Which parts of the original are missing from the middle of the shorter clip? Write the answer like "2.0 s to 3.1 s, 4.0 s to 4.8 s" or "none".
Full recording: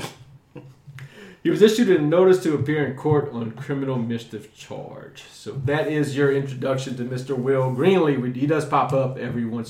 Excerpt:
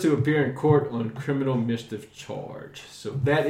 none